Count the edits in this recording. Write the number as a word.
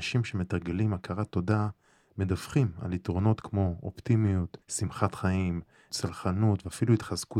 two